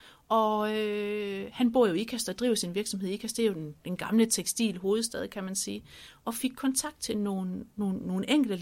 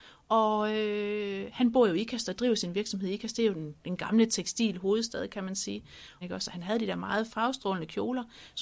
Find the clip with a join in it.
second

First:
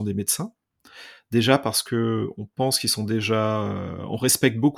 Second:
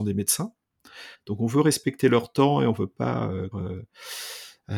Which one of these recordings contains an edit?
second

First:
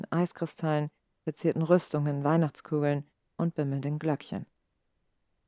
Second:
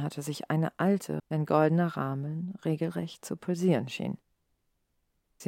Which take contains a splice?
second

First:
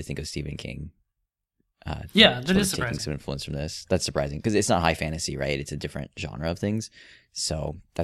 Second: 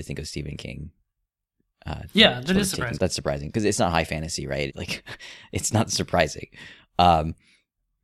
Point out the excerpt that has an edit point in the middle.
second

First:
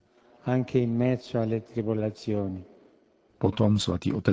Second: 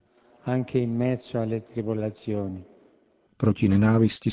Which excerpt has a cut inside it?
second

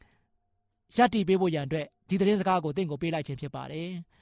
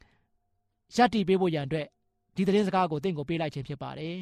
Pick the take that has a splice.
first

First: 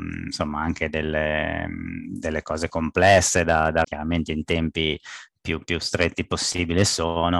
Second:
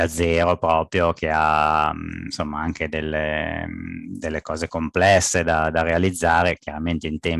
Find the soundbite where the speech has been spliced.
first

